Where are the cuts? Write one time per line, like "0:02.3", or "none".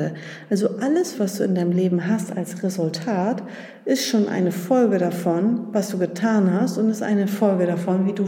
0:01.1

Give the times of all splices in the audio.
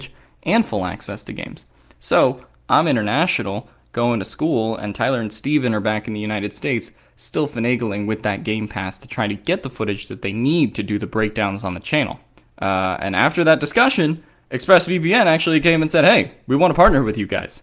0:12.4

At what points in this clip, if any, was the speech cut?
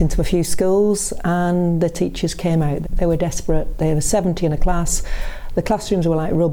0:02.8

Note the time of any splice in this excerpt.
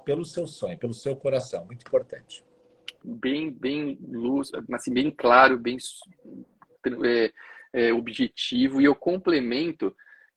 0:03.0

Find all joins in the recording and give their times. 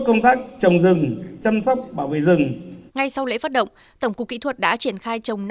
0:02.9

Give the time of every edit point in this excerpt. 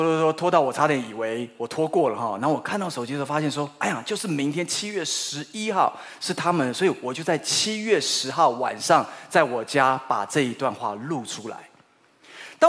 none

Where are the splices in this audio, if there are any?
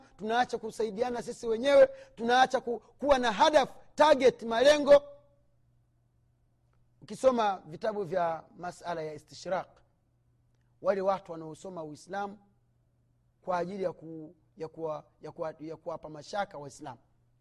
none

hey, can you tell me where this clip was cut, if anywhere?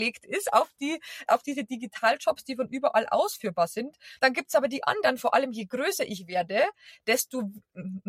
0:01.3
0:04.2

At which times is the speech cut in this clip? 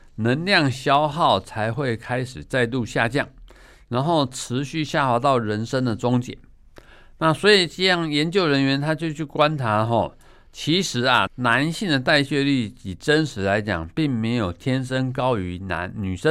0:11.3

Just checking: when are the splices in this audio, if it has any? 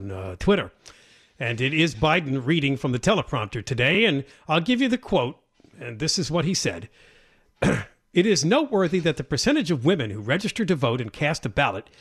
none

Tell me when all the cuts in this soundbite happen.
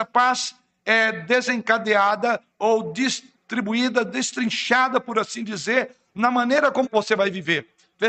0:06.8

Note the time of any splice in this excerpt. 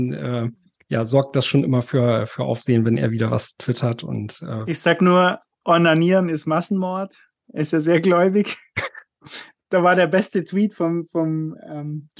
none

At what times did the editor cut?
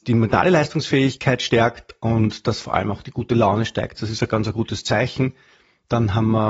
0:04.0

